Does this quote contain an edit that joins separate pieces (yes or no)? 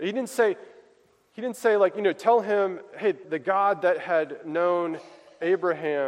yes